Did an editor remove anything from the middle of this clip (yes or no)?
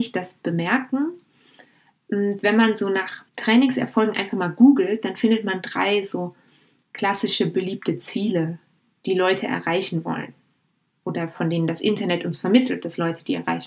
yes